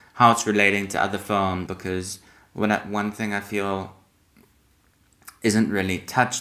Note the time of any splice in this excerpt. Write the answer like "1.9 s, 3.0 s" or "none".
1.7 s